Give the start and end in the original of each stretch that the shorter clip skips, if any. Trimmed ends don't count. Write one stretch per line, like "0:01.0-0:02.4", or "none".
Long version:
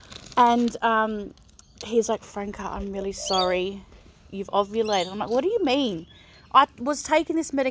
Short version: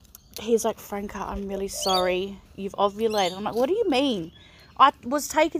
0:03.9-0:04.2